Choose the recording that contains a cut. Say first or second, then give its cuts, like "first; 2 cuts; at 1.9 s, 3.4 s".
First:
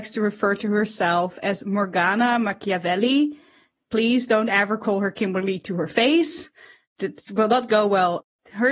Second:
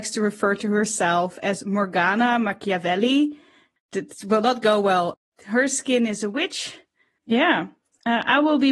second; 2 cuts; at 3.8 s, 7.2 s